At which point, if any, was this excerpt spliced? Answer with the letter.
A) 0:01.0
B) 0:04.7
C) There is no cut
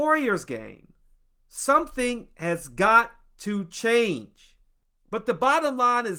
C